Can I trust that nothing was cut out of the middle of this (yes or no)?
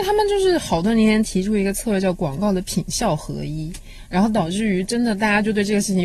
yes